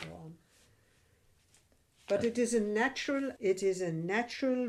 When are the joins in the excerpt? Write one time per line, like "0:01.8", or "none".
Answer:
0:03.4